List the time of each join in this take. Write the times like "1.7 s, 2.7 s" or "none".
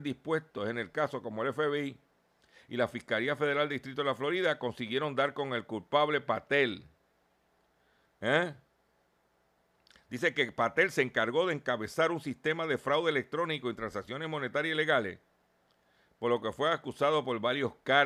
none